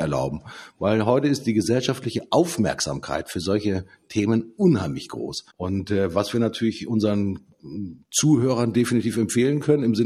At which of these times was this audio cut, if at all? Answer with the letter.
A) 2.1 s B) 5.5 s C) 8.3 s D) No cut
B